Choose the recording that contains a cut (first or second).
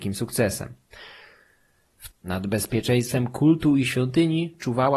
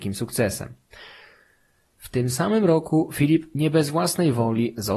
first